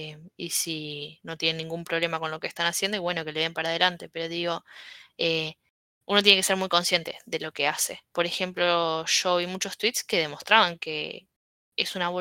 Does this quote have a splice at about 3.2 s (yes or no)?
no